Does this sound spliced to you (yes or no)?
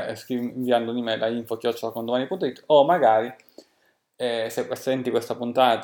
no